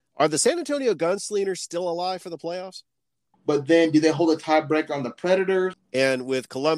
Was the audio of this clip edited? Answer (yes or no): yes